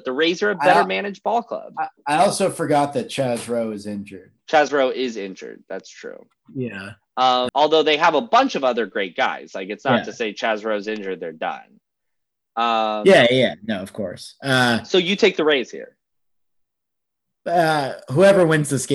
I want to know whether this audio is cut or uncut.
cut